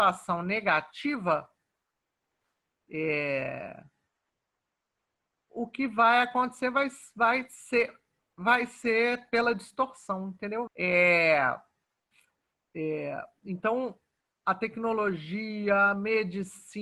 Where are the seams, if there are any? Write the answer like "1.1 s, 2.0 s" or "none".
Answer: 10.7 s